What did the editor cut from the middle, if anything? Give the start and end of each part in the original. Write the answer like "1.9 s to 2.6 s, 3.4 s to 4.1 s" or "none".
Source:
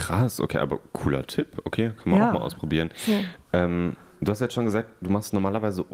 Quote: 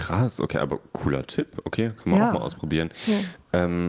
none